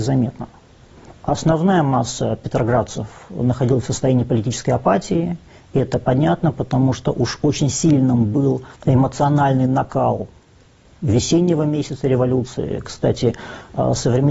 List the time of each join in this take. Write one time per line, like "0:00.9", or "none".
0:08.7
0:12.8